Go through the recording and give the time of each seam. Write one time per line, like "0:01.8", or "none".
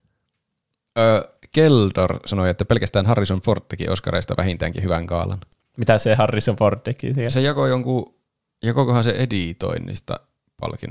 none